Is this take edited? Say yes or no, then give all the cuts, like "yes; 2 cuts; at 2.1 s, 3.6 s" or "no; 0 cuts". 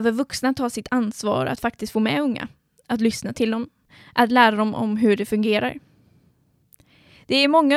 no; 0 cuts